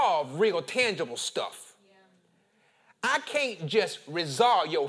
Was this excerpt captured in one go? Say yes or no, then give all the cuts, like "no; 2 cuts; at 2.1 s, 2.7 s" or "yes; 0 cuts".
yes; 0 cuts